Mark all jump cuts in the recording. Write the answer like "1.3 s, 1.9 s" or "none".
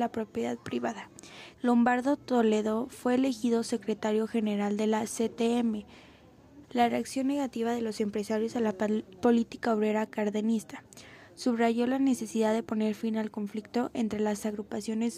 1.5 s, 6.6 s